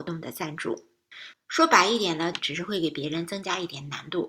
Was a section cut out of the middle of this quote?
yes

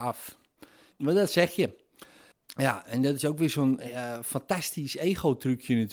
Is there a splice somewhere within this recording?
yes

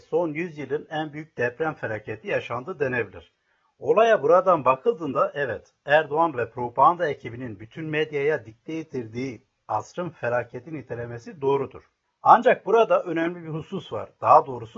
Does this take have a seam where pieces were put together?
no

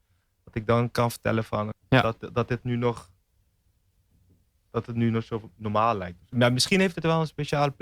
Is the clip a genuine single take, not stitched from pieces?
no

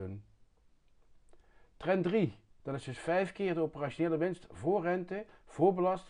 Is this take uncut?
no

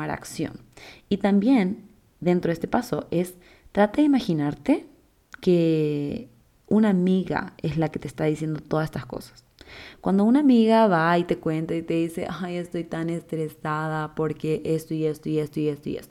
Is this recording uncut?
yes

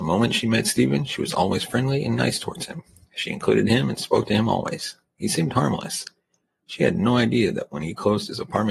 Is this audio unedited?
yes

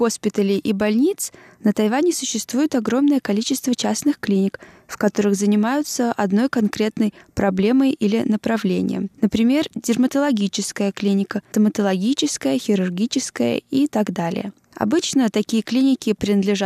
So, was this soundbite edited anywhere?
no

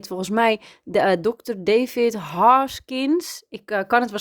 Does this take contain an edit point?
yes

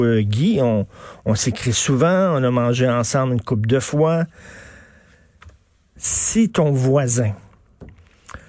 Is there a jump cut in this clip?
yes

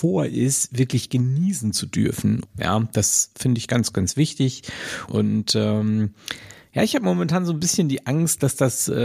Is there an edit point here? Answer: yes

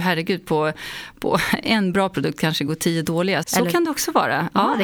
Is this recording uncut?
no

